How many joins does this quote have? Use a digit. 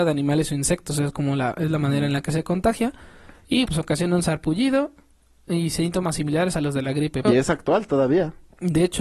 2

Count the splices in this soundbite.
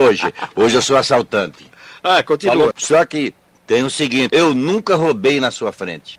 2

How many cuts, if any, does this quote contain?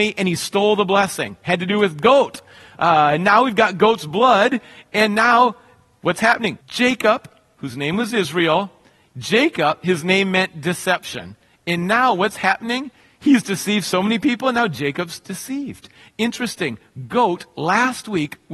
1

